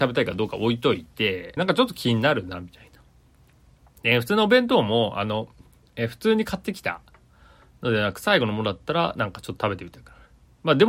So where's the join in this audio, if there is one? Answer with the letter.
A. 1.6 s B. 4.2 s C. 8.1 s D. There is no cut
A